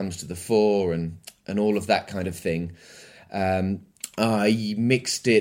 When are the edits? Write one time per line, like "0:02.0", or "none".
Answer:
none